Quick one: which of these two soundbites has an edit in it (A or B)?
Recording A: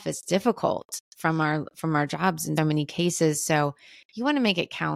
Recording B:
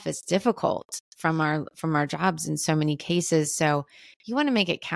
A